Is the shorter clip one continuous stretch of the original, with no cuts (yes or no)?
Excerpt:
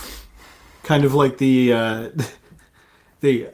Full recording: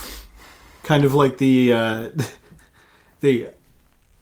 yes